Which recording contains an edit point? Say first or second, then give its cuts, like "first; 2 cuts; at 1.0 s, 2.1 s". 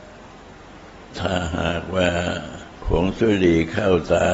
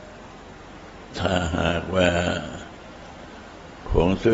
first; 1 cut; at 2.7 s